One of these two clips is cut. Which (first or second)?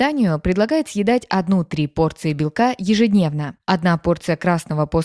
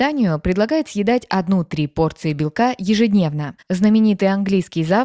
second